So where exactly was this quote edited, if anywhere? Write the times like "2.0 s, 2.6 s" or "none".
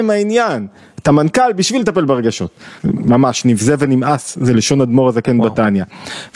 2.8 s